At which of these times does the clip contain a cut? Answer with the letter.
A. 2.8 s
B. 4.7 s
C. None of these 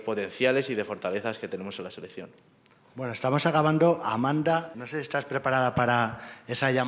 B